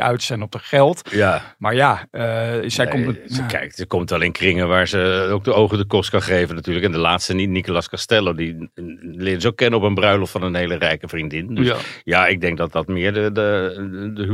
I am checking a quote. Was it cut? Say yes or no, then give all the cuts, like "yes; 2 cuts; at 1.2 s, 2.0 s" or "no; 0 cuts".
no; 0 cuts